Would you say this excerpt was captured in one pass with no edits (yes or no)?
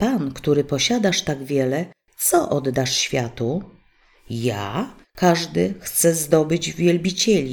no